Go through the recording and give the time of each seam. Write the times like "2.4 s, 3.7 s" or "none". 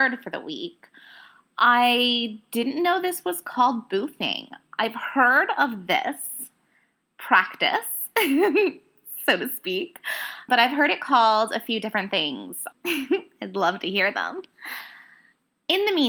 10.5 s, 12.7 s